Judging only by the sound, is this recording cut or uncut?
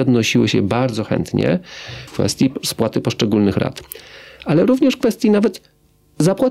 cut